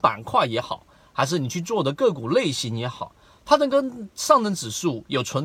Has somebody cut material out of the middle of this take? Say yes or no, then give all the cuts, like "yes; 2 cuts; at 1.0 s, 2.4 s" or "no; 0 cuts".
no; 0 cuts